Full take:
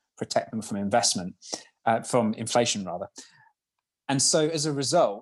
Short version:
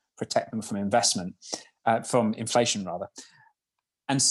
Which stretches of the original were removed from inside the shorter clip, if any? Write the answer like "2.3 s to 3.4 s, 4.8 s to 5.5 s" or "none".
none